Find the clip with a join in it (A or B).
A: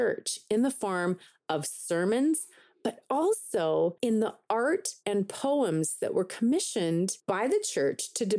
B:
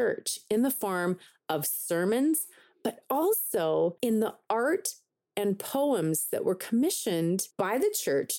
A